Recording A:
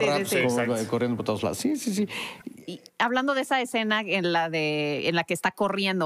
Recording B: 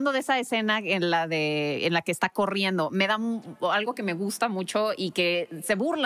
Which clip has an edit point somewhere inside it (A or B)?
A